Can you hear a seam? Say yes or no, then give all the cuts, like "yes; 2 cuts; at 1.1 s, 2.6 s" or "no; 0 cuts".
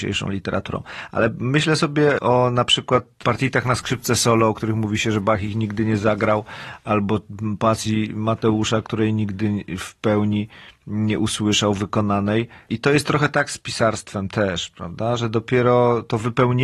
no; 0 cuts